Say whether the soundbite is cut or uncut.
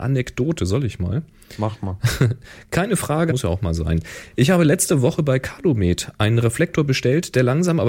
cut